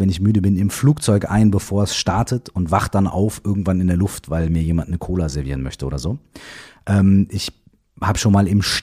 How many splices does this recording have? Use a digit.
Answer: 0